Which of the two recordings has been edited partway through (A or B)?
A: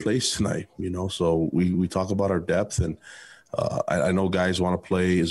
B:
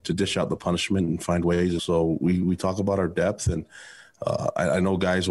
B